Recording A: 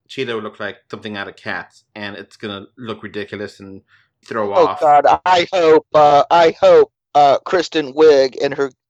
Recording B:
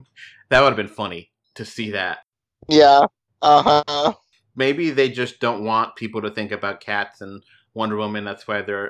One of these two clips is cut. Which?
A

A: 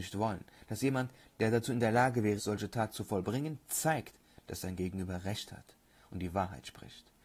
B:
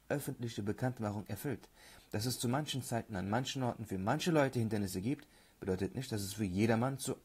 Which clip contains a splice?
A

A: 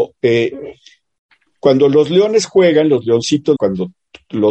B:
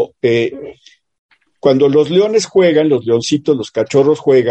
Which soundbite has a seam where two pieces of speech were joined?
A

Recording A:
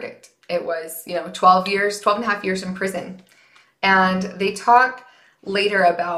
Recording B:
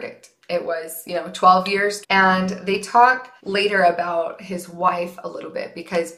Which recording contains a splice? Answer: B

